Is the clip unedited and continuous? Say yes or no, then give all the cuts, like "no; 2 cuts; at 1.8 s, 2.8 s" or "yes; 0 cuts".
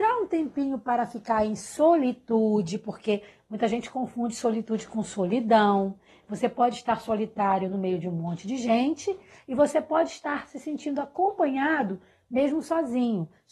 yes; 0 cuts